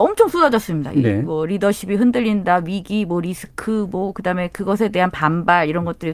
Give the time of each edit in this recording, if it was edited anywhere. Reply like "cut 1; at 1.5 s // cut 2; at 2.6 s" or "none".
none